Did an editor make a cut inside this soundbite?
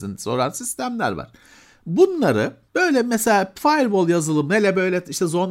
yes; 1 cut; at 2.7 s

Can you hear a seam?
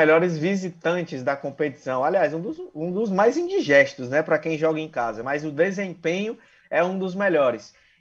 no; 0 cuts

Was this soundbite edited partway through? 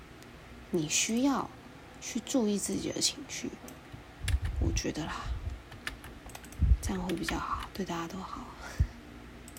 no; 0 cuts

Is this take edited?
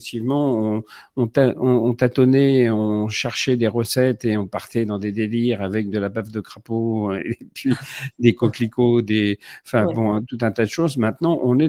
no; 0 cuts

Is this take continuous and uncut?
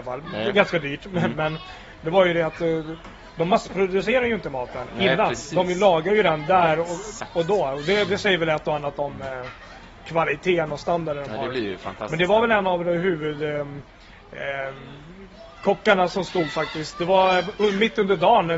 yes; 0 cuts

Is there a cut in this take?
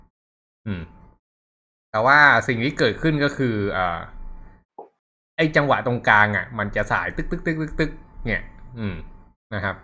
no; 0 cuts

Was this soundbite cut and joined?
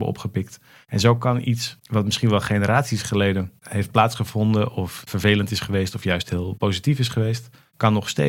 no; 0 cuts

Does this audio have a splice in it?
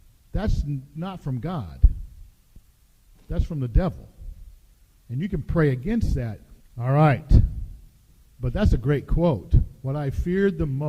yes; 1 cut; at 6.6 s

